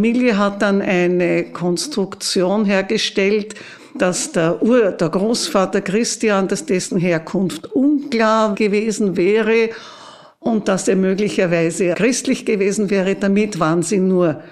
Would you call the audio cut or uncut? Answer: cut